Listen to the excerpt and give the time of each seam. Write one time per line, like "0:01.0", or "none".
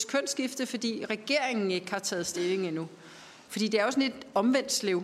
0:03.5

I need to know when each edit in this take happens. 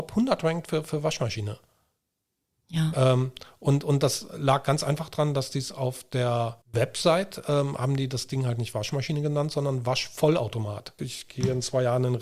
0:06.6
0:11.0

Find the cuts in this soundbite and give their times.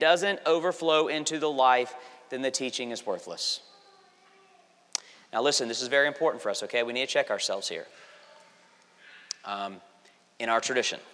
none

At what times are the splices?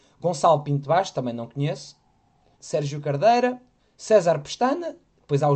0:02.5
0:03.8

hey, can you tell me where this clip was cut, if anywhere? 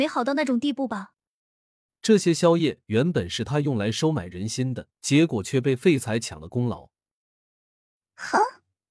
0:02.0
0:04.9

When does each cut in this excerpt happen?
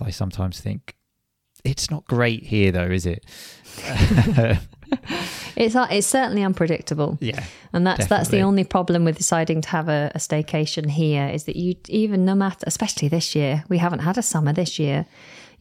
none

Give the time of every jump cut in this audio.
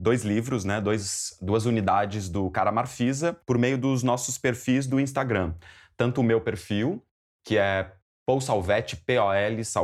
none

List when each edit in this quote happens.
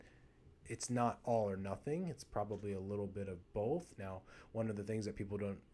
0:04.0

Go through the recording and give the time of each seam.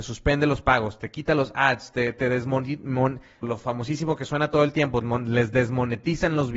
0:03.4
0:05.0

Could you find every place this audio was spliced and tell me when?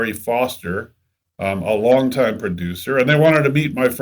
none

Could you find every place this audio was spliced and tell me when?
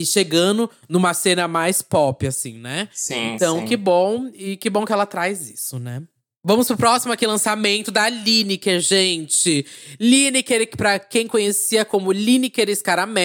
none

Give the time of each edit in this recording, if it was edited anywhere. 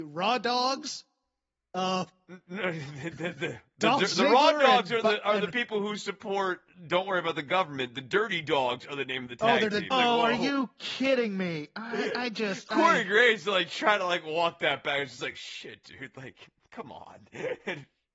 0:09.9

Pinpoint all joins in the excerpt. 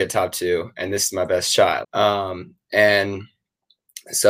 0:01.8

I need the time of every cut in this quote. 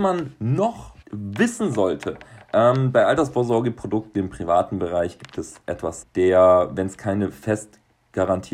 0:01.0
0:06.0

